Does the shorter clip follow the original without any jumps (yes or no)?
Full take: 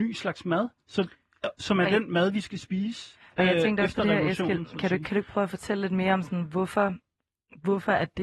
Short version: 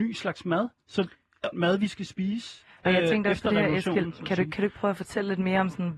no